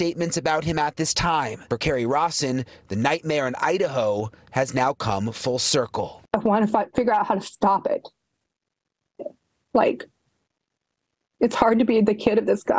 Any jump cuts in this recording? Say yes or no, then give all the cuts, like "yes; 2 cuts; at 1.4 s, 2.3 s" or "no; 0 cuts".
no; 0 cuts